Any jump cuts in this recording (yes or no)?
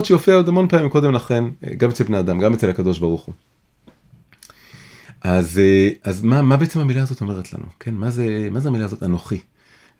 no